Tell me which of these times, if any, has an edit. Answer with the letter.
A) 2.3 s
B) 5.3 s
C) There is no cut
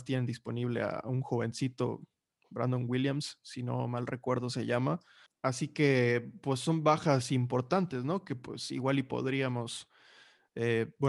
B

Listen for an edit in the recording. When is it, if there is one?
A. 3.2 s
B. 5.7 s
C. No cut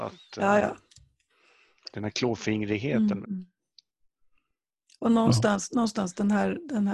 A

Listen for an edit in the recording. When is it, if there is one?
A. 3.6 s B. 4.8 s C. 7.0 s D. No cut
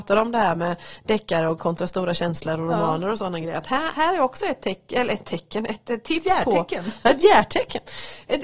D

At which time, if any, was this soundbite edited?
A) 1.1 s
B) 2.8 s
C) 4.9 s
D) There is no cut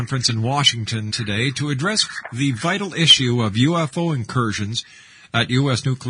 A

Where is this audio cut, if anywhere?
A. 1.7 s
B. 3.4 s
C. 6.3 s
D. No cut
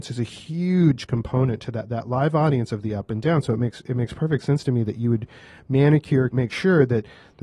C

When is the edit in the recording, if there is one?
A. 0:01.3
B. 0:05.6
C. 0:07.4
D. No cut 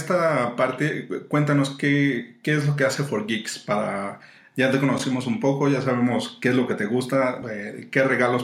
D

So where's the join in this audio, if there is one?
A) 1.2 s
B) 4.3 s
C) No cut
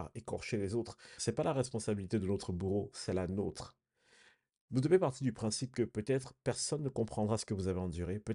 A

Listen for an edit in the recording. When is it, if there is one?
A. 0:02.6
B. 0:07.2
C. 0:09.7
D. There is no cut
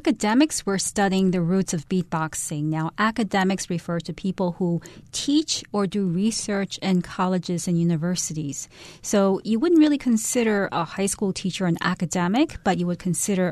D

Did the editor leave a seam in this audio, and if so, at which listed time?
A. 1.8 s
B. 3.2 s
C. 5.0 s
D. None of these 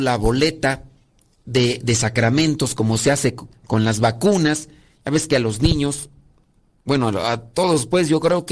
D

